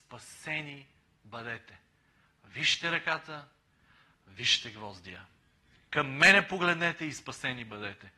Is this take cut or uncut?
uncut